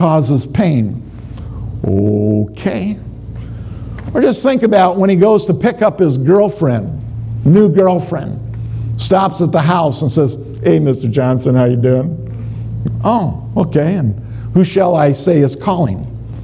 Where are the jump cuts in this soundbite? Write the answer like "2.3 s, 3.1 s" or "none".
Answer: 13.0 s